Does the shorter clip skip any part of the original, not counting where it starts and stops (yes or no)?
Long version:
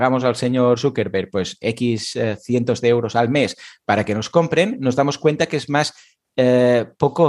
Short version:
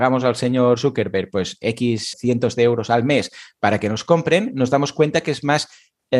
yes